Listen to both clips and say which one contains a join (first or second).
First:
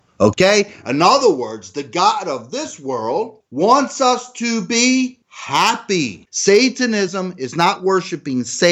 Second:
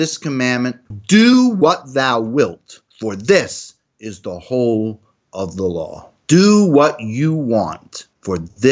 first